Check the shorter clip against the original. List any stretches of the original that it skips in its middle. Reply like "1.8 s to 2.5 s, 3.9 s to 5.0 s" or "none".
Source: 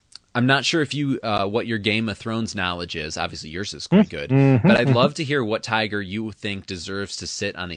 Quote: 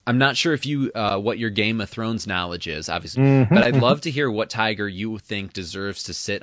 3.4 s to 4.3 s